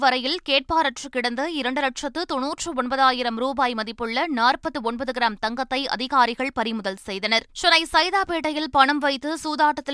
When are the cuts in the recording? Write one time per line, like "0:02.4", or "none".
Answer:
0:07.5